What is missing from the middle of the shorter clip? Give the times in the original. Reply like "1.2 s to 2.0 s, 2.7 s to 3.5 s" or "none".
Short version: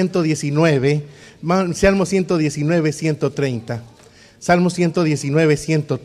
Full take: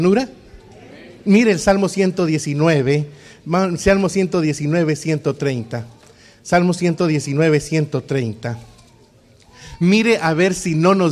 none